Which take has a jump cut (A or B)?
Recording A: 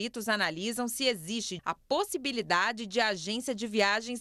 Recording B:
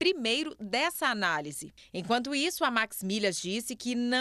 A